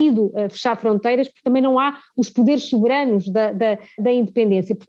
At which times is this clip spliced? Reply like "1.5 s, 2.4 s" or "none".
4.0 s

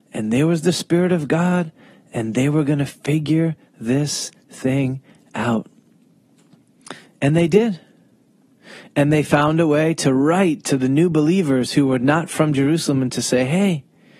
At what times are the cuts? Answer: none

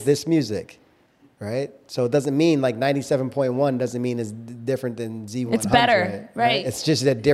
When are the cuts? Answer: none

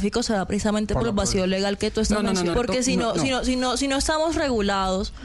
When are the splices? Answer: 2.5 s

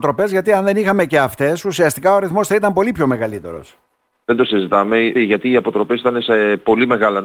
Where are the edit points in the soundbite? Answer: 5.1 s

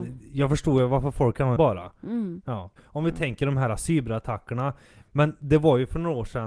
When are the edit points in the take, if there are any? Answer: 1.6 s, 2.8 s, 5.0 s

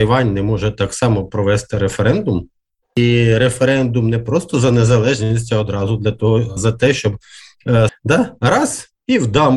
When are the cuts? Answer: 6.6 s, 7.9 s

